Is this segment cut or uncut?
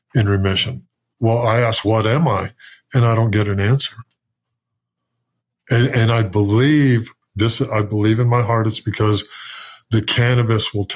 cut